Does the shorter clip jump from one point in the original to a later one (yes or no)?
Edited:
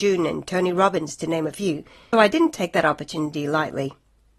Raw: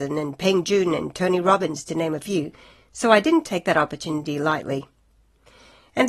yes